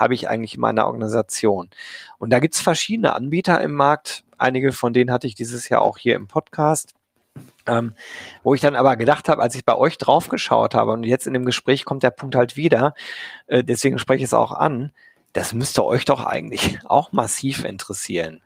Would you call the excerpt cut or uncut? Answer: uncut